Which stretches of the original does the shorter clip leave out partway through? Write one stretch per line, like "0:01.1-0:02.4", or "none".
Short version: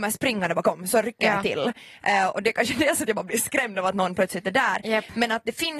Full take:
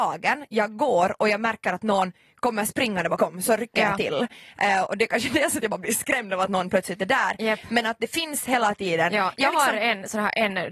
none

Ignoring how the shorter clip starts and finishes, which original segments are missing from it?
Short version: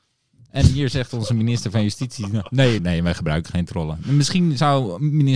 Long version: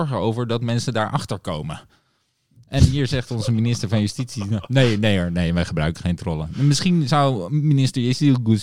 0:05.0-0:05.3

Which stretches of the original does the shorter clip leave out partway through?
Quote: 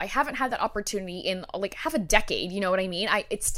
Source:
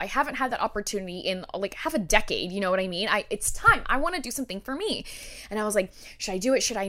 none

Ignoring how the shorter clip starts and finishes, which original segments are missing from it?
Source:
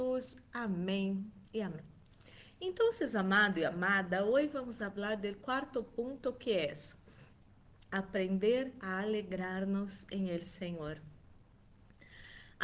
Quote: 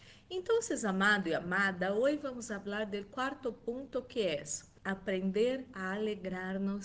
0:07.1-0:07.9

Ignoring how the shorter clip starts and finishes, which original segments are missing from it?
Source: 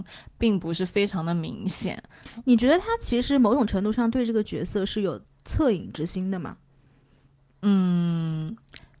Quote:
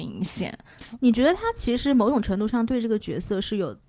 none

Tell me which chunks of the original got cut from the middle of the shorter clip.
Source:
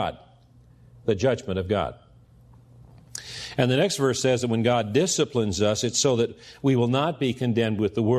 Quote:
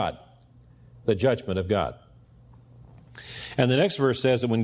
none

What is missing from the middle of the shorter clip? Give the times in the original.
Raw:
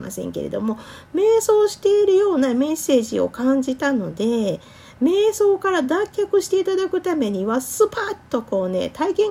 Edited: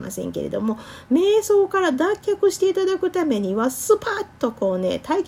0:01.1-0:05.0

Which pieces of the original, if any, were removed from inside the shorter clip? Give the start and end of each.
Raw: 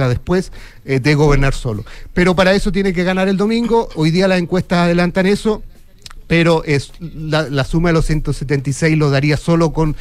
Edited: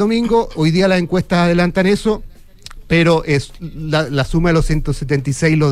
none

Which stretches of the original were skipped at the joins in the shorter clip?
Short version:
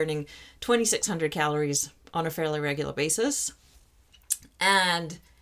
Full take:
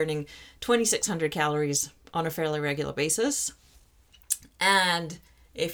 none

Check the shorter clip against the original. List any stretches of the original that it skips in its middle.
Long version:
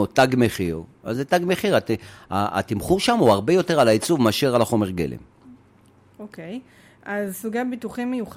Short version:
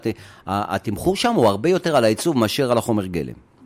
none

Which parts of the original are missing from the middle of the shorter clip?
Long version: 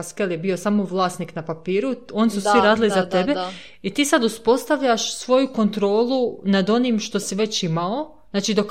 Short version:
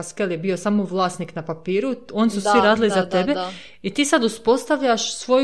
none

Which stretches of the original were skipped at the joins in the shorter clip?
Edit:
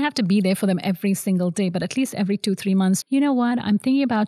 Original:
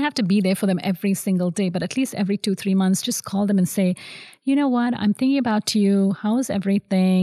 0:03.0-0:04.4

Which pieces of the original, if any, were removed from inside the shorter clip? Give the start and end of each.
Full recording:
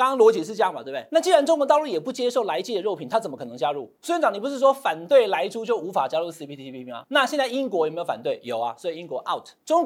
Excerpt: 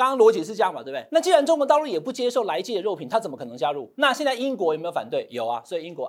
0:03.9-0:07.1

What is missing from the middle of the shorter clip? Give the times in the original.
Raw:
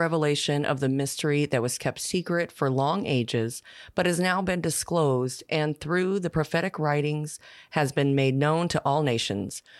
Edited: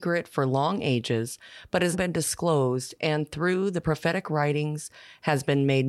0:04.2-0:04.4

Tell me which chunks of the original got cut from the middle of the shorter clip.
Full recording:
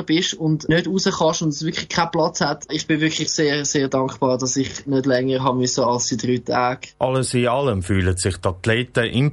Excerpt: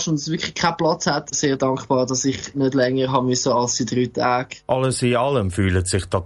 0:02.7-0:03.6

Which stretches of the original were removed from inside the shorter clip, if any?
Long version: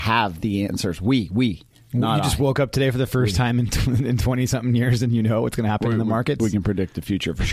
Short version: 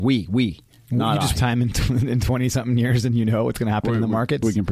0:02.4-0:03.3

